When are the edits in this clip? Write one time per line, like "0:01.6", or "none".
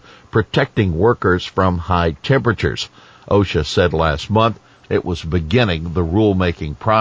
none